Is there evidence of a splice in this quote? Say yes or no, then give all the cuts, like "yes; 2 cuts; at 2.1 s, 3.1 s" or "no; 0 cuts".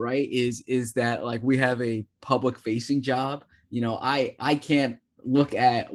no; 0 cuts